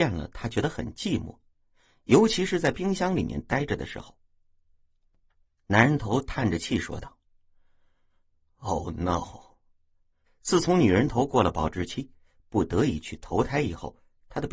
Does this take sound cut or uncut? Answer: cut